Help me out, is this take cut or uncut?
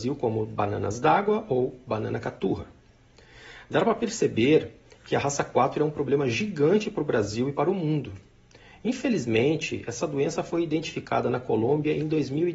uncut